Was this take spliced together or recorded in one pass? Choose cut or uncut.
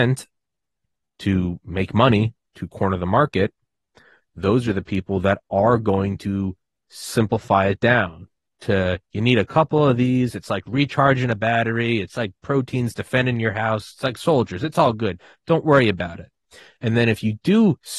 uncut